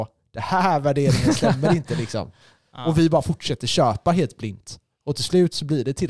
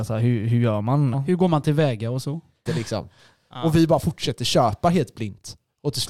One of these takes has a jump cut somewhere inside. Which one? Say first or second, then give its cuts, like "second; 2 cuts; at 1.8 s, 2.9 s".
second; 2 cuts; at 1.1 s, 2.7 s